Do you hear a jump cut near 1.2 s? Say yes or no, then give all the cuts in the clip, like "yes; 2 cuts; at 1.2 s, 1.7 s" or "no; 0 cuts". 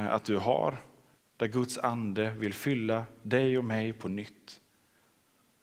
yes; 1 cut; at 1.2 s